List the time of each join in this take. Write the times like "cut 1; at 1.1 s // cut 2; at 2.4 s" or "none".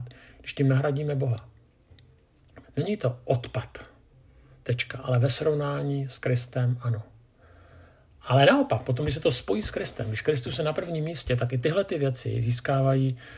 cut 1; at 2.6 s